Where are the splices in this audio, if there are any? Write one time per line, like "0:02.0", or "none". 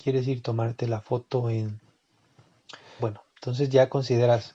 0:03.0